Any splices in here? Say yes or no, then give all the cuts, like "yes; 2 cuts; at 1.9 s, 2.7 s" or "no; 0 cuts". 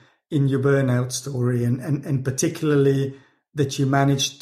no; 0 cuts